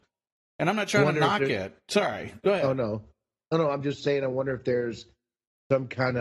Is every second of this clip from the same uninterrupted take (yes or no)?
yes